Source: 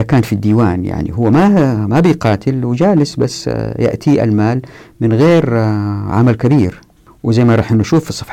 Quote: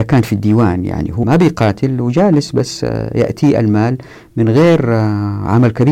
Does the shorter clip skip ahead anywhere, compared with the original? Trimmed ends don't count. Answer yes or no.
yes